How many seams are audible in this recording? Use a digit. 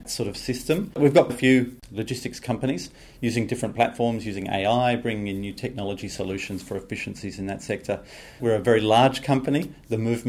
2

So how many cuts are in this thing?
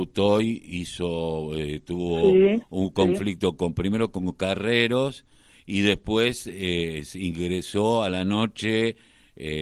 0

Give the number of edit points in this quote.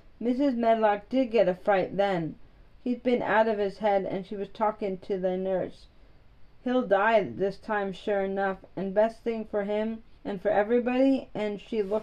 1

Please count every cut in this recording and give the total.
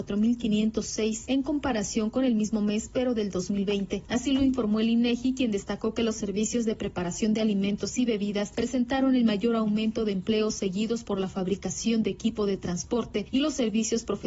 0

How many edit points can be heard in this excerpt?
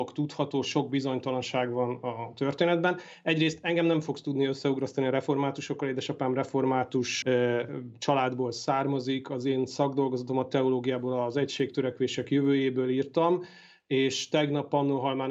1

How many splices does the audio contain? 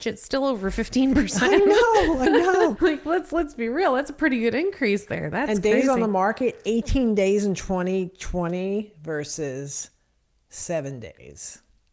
1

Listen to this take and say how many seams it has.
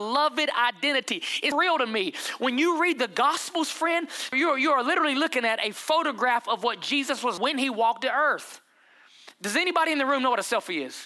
3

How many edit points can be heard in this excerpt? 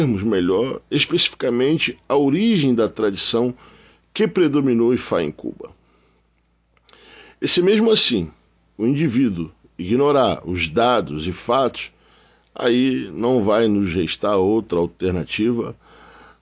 0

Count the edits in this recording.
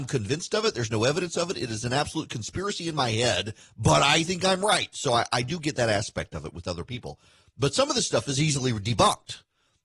0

